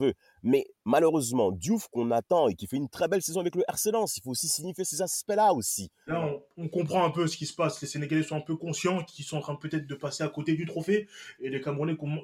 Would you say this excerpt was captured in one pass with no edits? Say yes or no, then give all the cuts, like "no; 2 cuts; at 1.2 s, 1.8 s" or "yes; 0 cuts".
no; 1 cut; at 6.1 s